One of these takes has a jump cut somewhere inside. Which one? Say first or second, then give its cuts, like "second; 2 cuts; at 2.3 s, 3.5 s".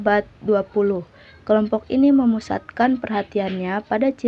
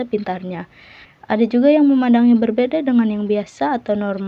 second; 1 cut; at 1.1 s